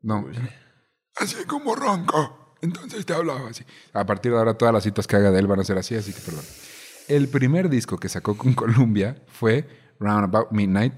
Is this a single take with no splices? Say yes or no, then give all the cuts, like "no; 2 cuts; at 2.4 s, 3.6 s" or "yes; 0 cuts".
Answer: yes; 0 cuts